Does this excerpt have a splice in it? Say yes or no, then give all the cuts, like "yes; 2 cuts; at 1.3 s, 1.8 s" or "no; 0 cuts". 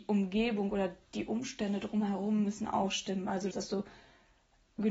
yes; 1 cut; at 3.5 s